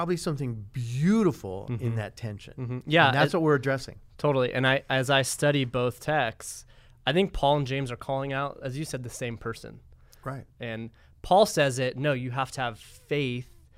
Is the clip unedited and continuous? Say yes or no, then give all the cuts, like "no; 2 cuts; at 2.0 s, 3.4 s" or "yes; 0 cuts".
no; 1 cut; at 10.5 s